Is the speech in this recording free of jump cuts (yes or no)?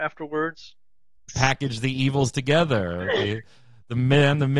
no